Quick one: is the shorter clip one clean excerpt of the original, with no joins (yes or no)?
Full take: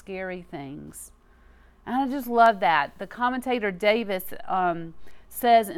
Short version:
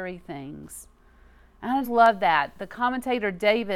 no